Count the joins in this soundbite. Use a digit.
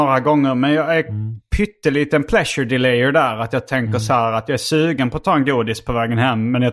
0